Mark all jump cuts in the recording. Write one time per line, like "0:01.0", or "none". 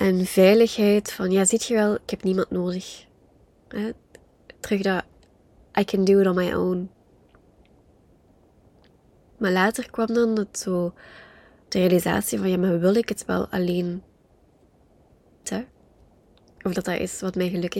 0:15.4